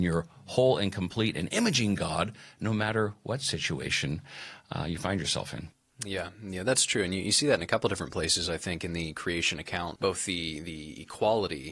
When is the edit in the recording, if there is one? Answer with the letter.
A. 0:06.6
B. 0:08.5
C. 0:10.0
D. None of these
C